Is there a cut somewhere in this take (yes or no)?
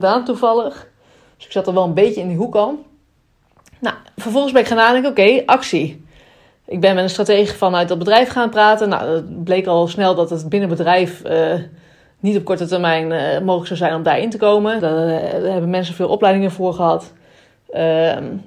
yes